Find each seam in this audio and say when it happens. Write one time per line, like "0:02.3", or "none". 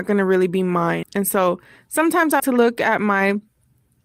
0:01.0
0:02.4